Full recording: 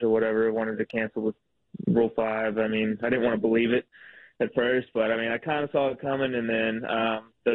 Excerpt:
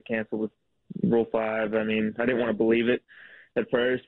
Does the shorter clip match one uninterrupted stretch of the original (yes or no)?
yes